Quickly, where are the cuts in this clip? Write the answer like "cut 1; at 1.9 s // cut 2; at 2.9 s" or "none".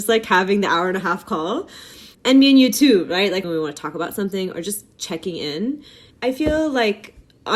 cut 1; at 2.1 s // cut 2; at 3.4 s // cut 3; at 6.1 s